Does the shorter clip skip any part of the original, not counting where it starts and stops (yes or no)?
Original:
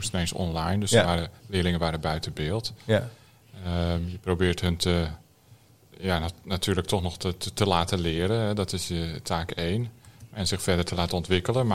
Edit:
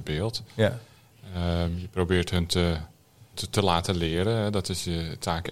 yes